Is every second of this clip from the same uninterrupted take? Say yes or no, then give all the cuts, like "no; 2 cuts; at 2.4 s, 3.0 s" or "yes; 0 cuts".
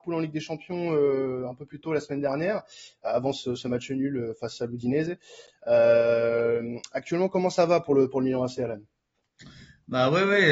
yes; 0 cuts